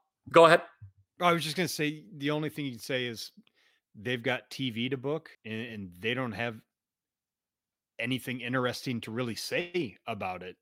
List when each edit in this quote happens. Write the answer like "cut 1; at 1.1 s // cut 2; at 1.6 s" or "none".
cut 1; at 5.3 s